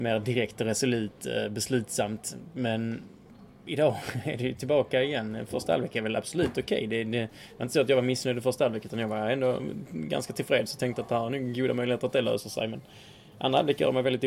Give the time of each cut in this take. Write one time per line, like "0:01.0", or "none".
none